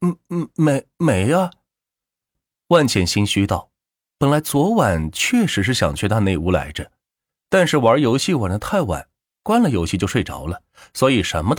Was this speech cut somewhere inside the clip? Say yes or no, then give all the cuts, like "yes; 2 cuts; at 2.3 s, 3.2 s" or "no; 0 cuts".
no; 0 cuts